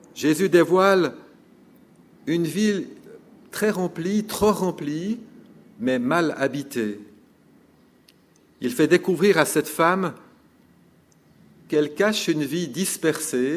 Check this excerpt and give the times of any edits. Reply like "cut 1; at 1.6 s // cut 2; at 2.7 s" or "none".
none